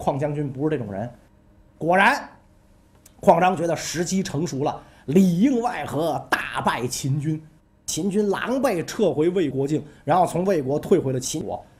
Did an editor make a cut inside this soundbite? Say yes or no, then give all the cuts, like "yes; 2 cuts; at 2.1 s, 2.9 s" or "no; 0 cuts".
yes; 1 cut; at 9.5 s